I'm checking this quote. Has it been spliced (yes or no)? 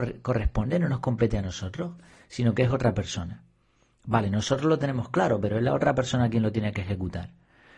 no